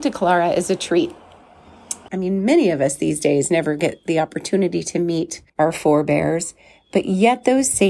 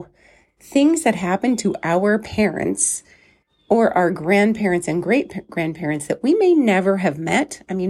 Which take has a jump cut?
first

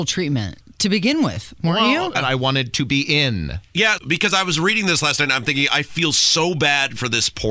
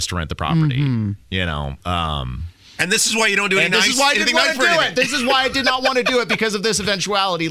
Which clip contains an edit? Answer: first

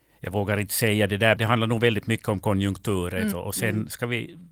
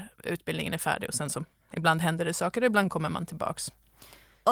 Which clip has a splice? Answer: first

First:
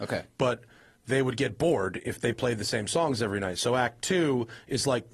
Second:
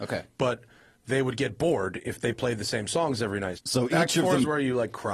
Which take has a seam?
second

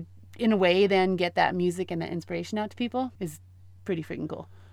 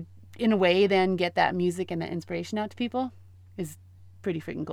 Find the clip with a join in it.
first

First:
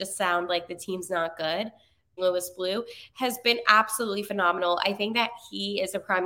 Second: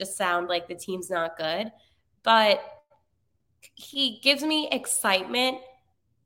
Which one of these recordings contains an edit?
first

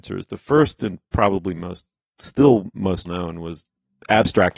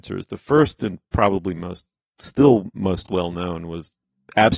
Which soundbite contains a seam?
first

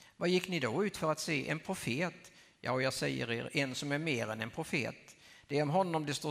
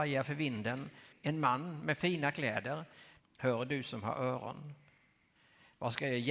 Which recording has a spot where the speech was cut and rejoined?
second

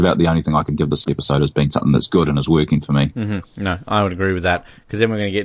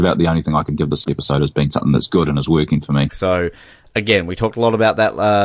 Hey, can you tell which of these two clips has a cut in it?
second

